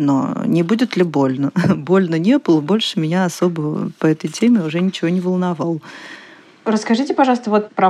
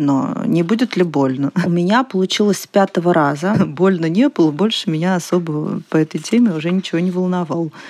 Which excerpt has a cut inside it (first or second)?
second